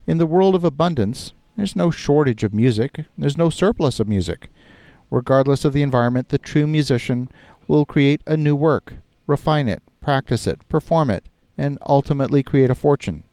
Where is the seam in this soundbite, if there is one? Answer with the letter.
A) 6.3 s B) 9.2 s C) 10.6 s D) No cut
C